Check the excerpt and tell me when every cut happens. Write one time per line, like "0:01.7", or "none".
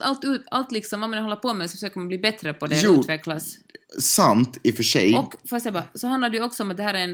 none

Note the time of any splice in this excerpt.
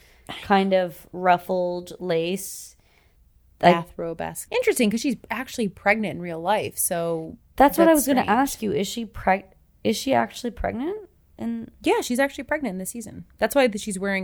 0:04.5

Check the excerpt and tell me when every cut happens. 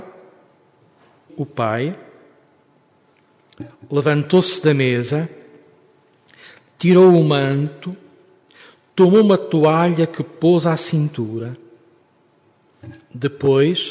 0:01.3

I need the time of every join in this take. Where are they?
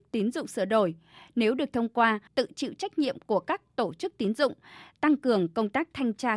0:02.3

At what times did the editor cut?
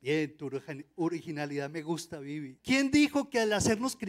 0:02.6

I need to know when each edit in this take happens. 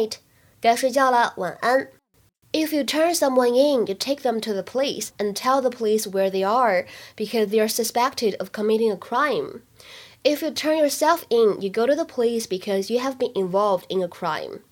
0:02.4

